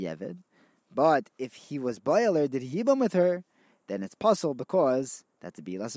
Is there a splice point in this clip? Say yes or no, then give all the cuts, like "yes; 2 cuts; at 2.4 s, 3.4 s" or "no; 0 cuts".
no; 0 cuts